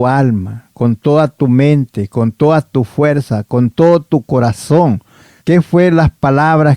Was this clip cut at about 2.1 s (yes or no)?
no